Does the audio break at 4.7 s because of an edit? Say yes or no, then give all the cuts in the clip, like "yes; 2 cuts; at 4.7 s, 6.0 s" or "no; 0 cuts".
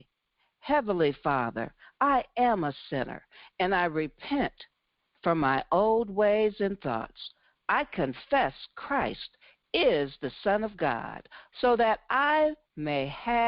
no; 1 cut; at 11.5 s